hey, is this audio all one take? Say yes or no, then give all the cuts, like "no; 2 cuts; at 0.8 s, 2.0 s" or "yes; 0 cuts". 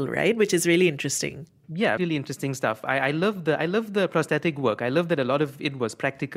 no; 1 cut; at 2.0 s